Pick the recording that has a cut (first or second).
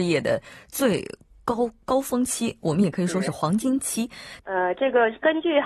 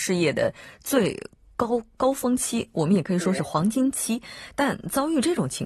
first